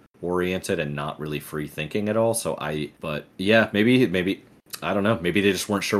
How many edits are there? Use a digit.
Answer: 0